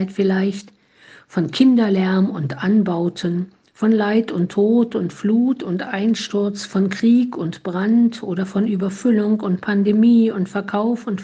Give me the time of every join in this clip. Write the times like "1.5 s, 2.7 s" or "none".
none